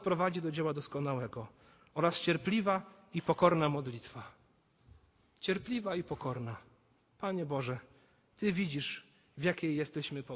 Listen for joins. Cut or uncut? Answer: uncut